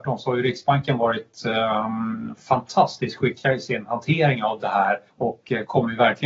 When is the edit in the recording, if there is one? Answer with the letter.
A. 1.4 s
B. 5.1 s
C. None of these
B